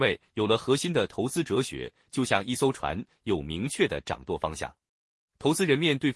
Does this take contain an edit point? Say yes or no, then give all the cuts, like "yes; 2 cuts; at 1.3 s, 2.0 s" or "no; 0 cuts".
no; 0 cuts